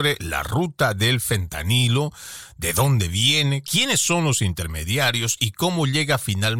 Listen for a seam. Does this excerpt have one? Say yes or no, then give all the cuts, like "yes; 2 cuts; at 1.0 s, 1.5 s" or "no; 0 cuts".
yes; 1 cut; at 3.6 s